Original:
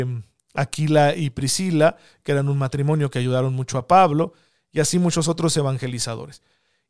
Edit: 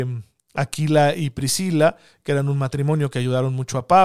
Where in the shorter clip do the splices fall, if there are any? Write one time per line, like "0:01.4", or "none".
none